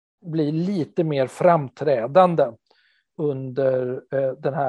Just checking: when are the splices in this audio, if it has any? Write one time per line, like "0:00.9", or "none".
0:03.1